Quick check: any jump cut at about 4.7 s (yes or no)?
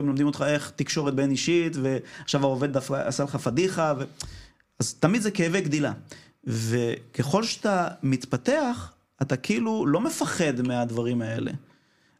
no